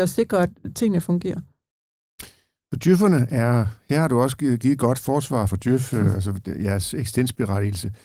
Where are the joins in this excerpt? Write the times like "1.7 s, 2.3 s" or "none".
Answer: 5.5 s